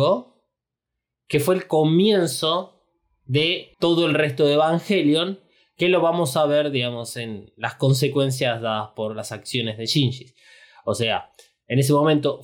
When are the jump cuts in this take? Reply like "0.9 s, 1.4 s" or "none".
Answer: 3.7 s